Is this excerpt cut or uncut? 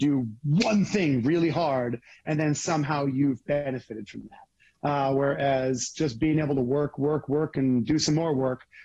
uncut